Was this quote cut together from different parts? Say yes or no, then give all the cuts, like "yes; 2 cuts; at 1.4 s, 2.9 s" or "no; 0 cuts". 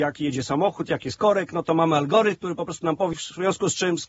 yes; 1 cut; at 3.1 s